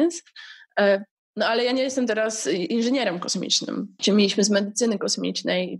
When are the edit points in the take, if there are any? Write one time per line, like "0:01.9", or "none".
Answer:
0:04.0